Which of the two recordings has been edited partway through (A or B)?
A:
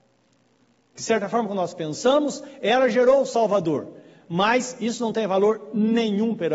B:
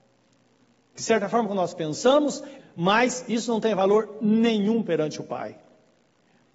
B